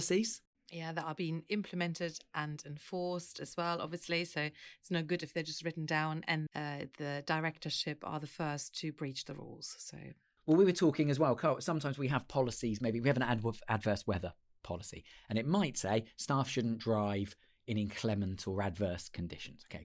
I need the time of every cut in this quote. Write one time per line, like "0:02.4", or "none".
0:06.5